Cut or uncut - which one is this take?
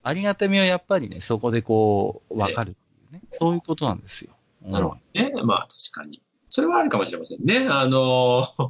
cut